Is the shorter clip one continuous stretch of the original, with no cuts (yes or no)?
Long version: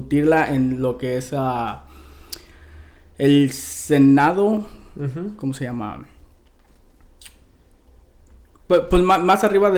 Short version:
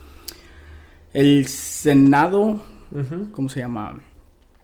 yes